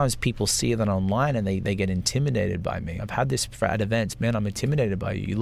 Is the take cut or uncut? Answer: uncut